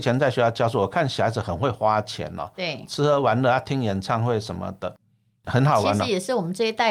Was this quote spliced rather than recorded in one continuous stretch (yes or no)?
yes